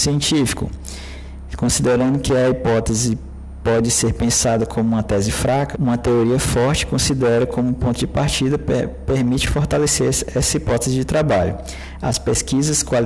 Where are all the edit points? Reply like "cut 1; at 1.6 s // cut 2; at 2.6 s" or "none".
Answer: cut 1; at 5.7 s